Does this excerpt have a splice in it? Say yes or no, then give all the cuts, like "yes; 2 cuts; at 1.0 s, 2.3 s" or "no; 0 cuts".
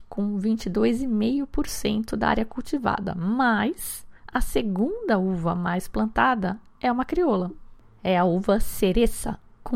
no; 0 cuts